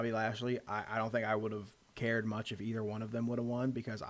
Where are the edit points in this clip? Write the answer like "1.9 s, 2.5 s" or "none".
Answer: none